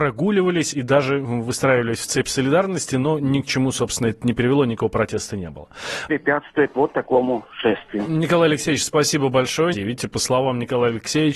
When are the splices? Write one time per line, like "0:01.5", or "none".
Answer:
0:06.1
0:09.7